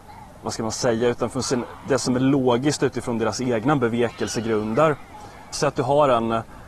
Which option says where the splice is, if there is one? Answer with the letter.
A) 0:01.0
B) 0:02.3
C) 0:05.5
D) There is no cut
C